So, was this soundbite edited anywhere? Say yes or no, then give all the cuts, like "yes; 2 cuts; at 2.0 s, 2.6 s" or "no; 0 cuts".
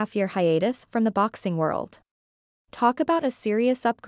yes; 1 cut; at 2.6 s